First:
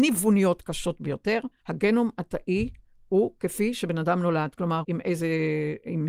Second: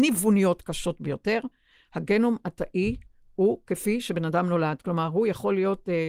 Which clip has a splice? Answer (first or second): first